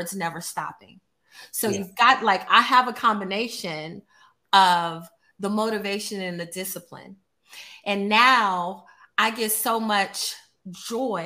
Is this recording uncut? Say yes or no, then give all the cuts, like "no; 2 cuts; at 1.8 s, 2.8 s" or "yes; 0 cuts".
yes; 0 cuts